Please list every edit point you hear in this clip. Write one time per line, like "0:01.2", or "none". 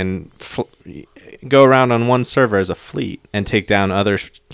0:03.3

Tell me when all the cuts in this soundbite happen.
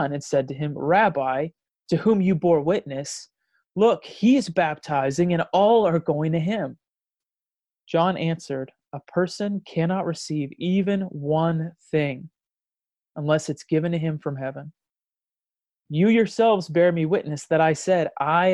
0:01.7

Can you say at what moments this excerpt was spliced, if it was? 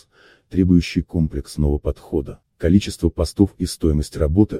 0:02.4

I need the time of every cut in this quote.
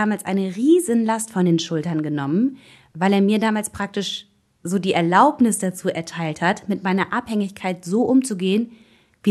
none

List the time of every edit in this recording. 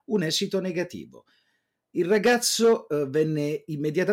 0:01.9

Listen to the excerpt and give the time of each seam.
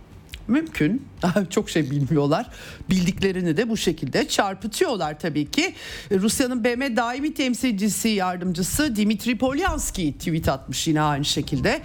none

